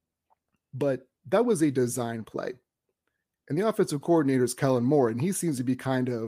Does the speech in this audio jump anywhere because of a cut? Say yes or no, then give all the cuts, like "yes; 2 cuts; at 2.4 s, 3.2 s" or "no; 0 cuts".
no; 0 cuts